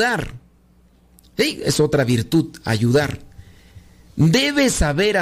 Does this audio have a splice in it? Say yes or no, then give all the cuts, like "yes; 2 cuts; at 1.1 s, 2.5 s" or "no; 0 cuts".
no; 0 cuts